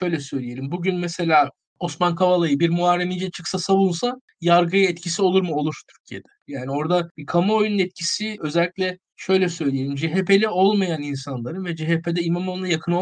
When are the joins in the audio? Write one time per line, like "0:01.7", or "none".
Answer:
0:06.4